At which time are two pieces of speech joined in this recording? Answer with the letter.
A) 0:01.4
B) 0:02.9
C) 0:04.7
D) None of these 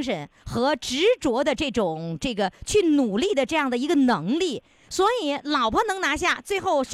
D